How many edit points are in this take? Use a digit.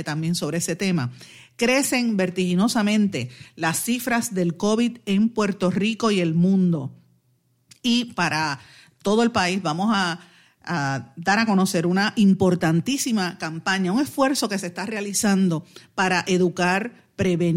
0